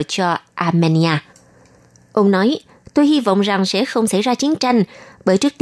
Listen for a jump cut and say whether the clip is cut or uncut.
uncut